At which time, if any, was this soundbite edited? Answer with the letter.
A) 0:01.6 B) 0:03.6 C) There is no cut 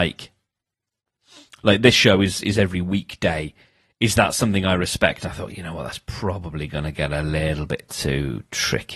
C